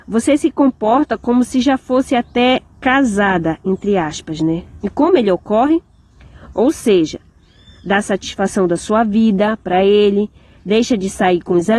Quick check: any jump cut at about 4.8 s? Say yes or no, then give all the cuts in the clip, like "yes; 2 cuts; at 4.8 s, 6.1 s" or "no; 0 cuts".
yes; 2 cuts; at 4.8 s, 6.5 s